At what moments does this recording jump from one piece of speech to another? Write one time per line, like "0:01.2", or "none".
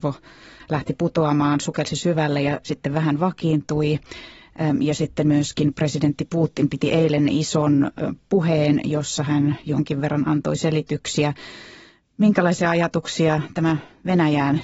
none